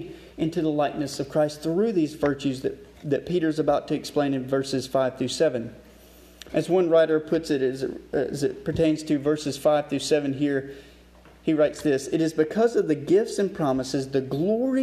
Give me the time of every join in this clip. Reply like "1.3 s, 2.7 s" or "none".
6.5 s